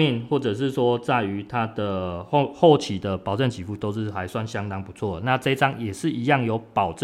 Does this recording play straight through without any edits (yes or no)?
yes